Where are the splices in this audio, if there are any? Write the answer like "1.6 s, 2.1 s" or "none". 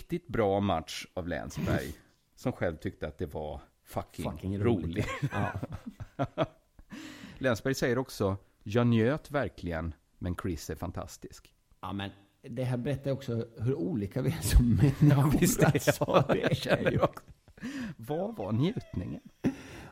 none